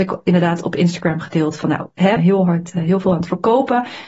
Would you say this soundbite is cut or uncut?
cut